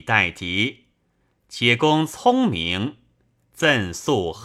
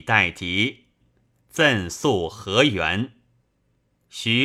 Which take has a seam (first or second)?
second